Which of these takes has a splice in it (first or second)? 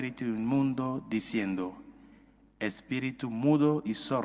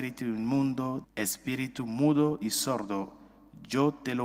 second